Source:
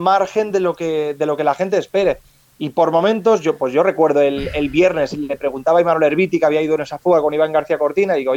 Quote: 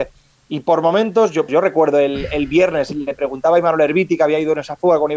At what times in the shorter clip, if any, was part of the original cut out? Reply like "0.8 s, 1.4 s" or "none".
1.5 s